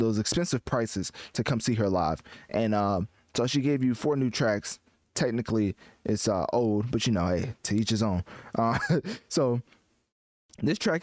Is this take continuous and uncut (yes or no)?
yes